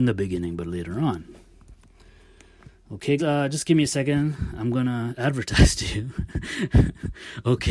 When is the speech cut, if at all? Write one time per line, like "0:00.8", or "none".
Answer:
0:03.2